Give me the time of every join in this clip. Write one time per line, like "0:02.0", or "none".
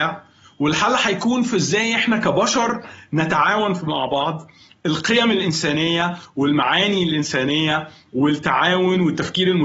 none